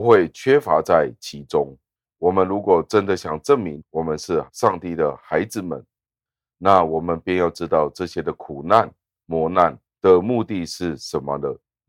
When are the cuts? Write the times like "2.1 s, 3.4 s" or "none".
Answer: 2.0 s